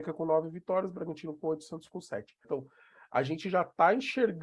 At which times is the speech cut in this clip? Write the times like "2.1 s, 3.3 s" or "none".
2.4 s